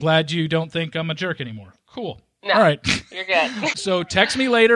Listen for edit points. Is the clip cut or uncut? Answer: cut